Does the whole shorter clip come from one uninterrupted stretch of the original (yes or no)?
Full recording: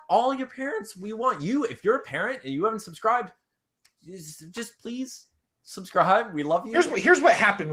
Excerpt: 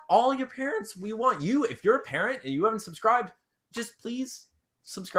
no